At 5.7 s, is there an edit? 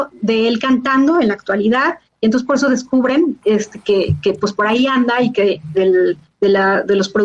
yes; 1 cut; at 5.7 s

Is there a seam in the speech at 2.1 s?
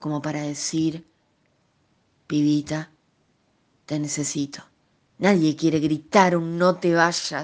no; 1 cut; at 5.0 s

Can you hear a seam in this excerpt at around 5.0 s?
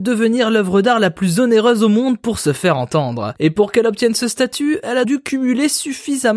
yes; 1 cut; at 5.0 s

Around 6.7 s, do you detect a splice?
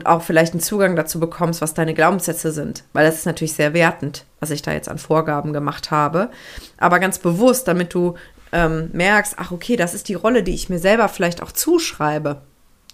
no; 0 cuts

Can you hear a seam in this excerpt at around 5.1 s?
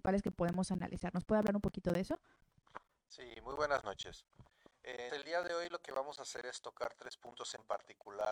yes; 1 cut; at 5.1 s

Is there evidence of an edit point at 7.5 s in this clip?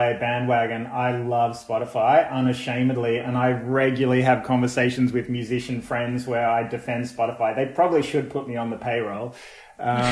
no; 0 cuts

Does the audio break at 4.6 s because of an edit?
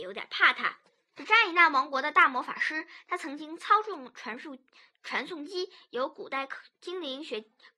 no; 1 cut; at 1.1 s

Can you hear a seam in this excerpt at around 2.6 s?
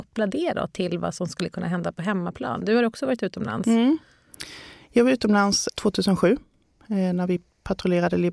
no; 1 cut; at 5.7 s

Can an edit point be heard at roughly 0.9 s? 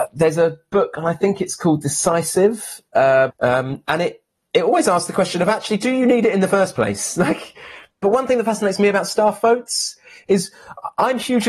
no; 1 cut; at 3.3 s

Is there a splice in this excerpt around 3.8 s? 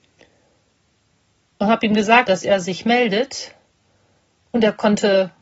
no; 1 cut; at 2.3 s

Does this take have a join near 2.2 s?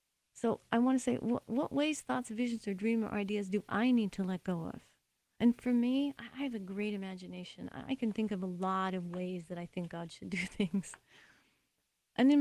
no; 0 cuts

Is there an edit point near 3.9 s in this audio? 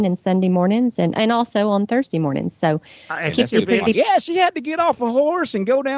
yes; 1 cut; at 3.9 s

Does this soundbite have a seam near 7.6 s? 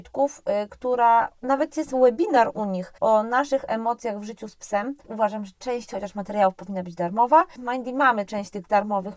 yes; 2 cuts; at 5.0 s, 7.6 s

